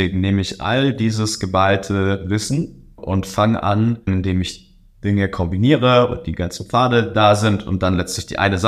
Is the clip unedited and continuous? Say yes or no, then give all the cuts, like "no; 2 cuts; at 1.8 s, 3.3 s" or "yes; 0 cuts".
no; 2 cuts; at 3.0 s, 4.1 s